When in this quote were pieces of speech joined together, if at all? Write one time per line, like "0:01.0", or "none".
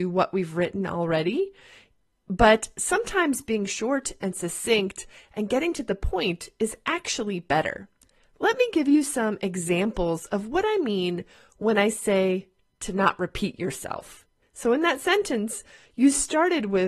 0:14.4

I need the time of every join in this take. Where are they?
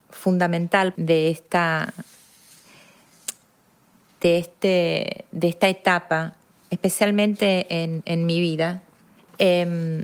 0:00.9

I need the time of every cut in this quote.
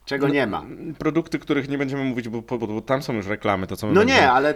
0:02.6

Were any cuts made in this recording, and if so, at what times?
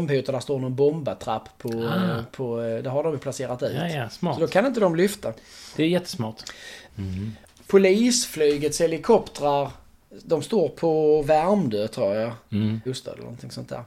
0:06.9
0:12.9

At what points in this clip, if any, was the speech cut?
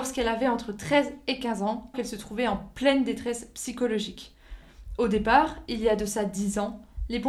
0:01.9

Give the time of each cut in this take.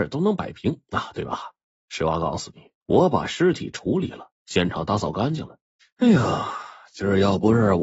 0:02.8
0:05.8

